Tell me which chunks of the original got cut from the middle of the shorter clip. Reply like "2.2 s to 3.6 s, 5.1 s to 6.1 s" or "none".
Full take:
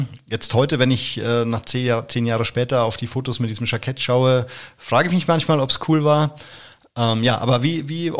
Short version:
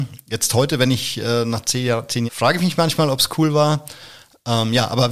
2.3 s to 4.8 s